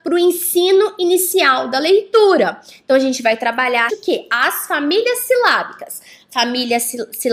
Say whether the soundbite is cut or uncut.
cut